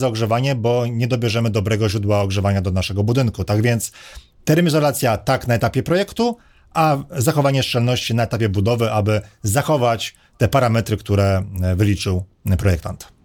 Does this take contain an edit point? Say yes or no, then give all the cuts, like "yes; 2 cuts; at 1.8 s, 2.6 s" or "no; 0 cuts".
no; 0 cuts